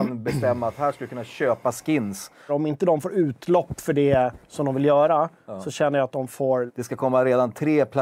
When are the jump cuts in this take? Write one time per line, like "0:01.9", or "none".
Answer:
0:02.5
0:06.7